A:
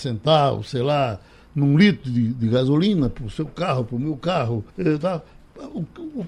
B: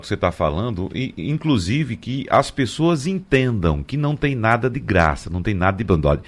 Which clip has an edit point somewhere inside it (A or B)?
A